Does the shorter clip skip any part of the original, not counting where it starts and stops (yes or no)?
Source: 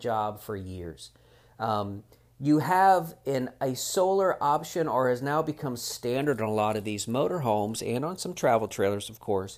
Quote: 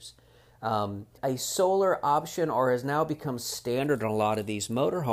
yes